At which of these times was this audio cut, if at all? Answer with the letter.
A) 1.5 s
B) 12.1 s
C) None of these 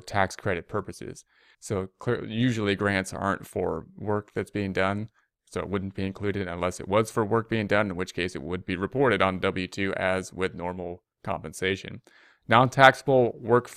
A